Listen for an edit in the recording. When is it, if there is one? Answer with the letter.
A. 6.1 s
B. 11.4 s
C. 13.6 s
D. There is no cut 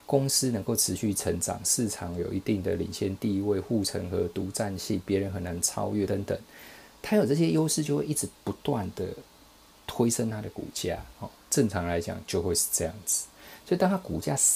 A